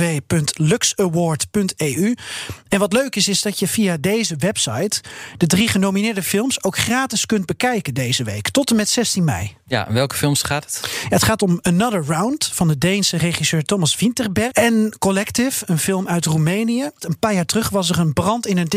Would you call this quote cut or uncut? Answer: cut